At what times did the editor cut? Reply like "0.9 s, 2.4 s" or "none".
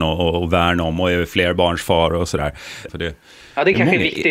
2.9 s